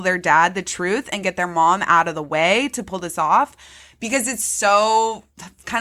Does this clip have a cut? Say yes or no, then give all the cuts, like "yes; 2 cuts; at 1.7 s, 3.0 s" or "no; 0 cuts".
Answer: no; 0 cuts